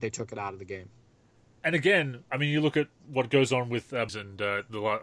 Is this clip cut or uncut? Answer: cut